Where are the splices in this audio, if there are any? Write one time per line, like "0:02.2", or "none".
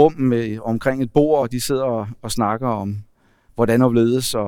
none